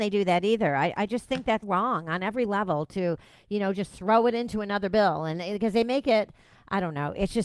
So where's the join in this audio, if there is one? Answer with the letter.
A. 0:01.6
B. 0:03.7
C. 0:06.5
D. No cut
A